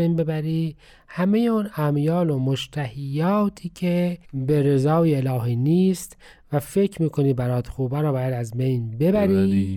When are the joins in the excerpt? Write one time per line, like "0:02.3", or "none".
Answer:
0:04.2

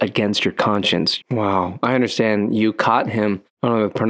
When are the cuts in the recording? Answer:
0:01.2

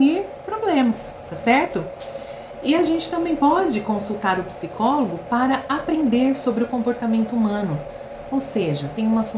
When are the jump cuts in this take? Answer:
none

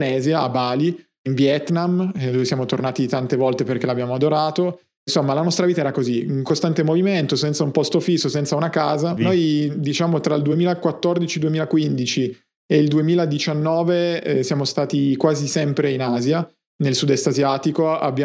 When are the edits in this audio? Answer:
0:09.2

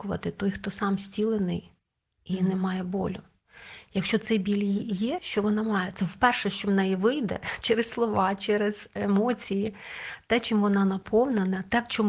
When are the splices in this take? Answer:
0:05.2

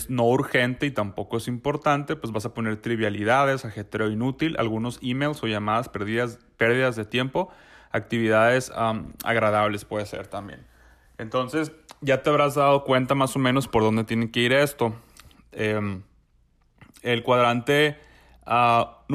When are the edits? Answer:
none

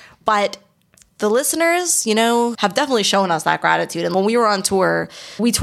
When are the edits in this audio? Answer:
0:02.5

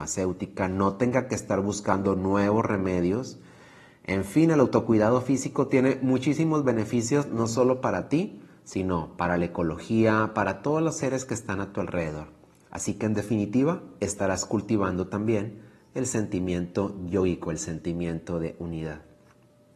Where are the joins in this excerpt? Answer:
none

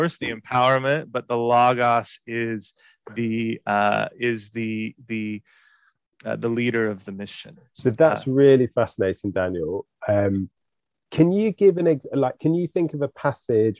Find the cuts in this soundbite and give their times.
none

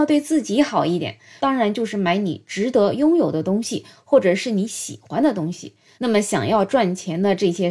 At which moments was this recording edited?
0:01.4
0:05.9

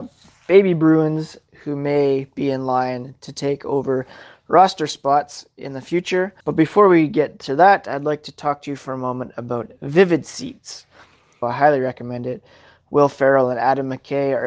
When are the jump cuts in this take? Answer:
0:06.4
0:11.4

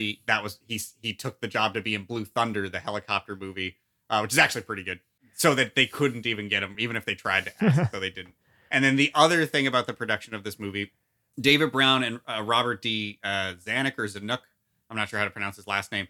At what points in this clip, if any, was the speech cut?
none

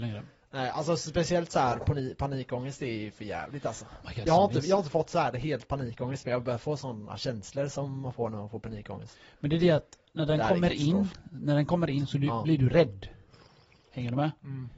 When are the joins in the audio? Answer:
0:04.3

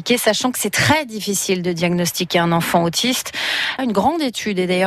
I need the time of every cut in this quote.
0:03.8

